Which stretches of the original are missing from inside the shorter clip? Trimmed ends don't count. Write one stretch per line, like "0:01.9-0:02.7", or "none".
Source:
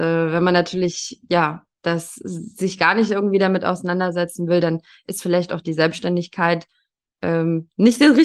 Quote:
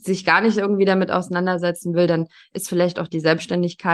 none

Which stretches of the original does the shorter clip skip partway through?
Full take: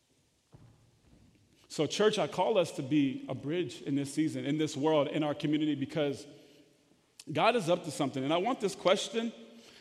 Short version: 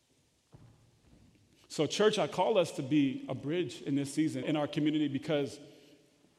0:04.4-0:05.1

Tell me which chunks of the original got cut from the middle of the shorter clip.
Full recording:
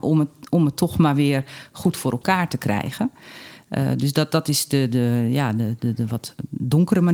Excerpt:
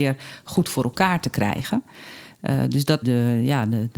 0:04.3-0:04.9

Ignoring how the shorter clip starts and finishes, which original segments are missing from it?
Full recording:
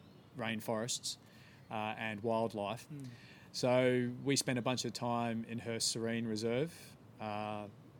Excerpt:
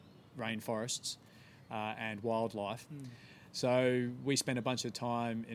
none

